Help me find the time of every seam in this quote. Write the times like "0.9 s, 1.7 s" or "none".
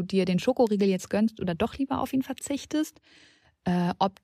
none